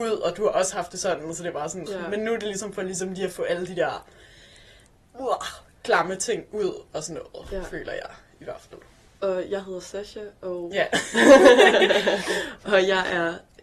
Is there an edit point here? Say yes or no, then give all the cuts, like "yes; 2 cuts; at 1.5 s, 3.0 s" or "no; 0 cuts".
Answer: yes; 1 cut; at 1.9 s